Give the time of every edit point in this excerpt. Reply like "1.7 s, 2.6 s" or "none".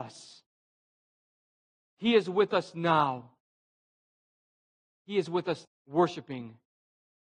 5.7 s